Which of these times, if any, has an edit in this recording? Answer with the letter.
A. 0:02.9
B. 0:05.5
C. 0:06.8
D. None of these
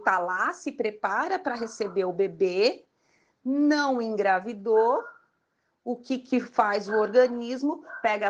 D